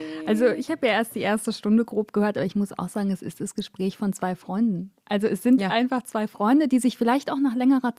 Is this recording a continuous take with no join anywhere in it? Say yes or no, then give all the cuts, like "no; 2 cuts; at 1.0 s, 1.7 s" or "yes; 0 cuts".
yes; 0 cuts